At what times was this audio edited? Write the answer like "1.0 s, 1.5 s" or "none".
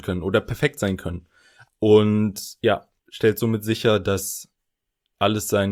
1.7 s, 3.0 s